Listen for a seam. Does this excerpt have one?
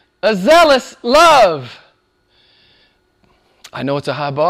no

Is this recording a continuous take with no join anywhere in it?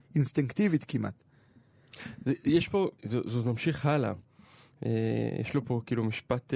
no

